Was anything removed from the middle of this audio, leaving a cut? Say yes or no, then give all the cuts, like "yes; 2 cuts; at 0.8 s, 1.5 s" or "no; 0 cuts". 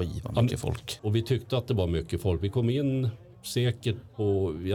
yes; 1 cut; at 1.0 s